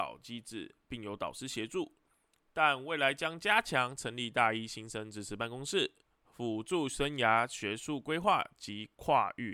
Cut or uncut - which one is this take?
uncut